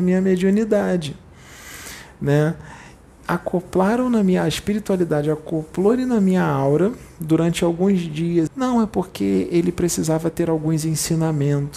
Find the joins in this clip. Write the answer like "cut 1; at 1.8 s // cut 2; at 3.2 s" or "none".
cut 1; at 8.5 s